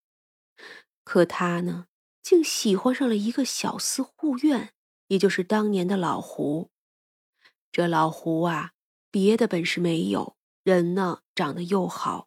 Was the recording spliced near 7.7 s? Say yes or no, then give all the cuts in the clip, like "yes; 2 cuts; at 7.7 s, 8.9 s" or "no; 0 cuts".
no; 1 cut; at 10.4 s